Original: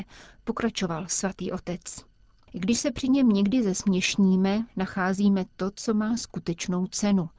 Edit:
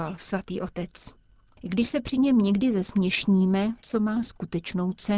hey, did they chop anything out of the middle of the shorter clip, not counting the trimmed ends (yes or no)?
yes